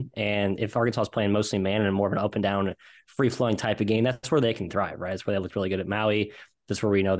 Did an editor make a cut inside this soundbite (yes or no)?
no